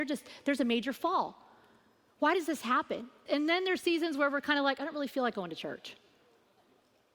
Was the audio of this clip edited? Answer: yes; 1 cut; at 3.3 s

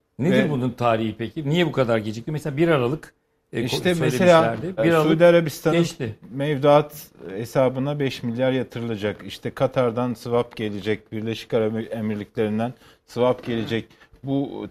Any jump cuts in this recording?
yes; 1 cut; at 4.8 s

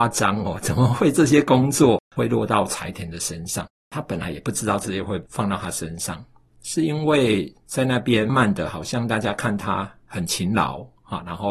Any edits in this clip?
yes; 1 cut; at 8.3 s

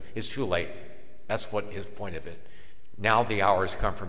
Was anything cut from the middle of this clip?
no; 0 cuts

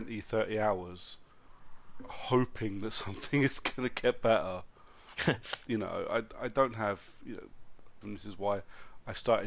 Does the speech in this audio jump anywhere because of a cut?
yes; 1 cut; at 8.0 s

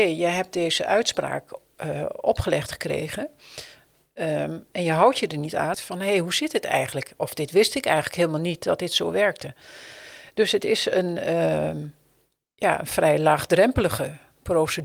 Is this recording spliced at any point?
yes; 1 cut; at 5.7 s

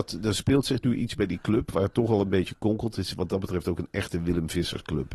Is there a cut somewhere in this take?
no; 0 cuts

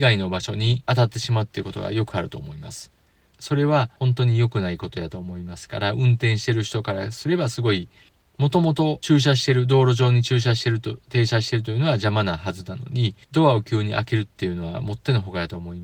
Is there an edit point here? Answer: yes; 2 cuts; at 3.3 s, 13.2 s

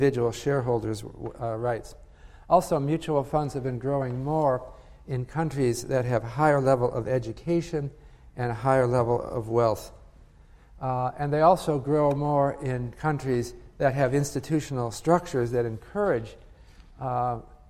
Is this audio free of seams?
yes; 0 cuts

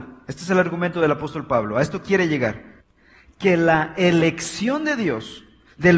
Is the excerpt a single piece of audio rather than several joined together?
yes; 0 cuts

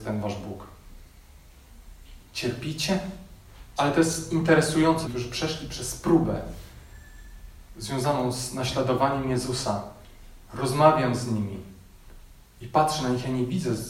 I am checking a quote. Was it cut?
yes; 3 cuts; at 2.2 s, 3.8 s, 5.0 s

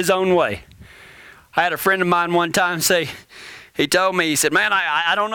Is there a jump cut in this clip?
no; 0 cuts

